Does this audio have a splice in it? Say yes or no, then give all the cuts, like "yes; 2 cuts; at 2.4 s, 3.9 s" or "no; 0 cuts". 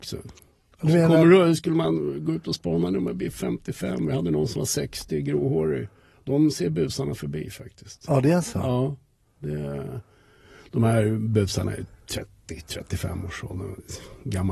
no; 0 cuts